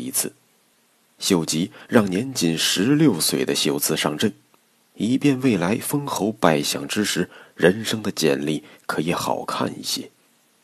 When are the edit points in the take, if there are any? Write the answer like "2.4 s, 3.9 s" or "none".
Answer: 4.8 s